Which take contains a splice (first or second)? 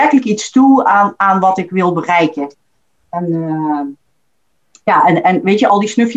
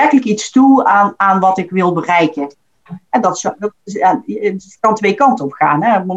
second